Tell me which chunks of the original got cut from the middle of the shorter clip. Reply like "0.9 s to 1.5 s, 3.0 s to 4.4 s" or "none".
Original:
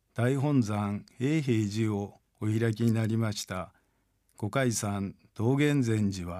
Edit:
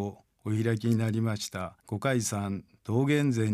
3.8 s to 4.3 s